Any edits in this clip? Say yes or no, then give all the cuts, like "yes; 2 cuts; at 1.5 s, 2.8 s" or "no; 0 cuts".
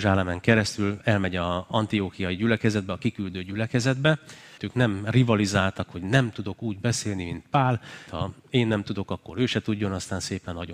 yes; 2 cuts; at 4.6 s, 8.1 s